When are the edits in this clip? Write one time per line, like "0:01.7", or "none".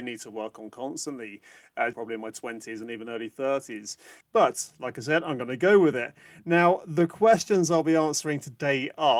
0:01.9
0:04.2